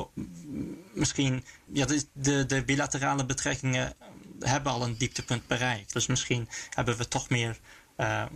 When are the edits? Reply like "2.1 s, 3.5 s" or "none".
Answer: 1.7 s, 5.9 s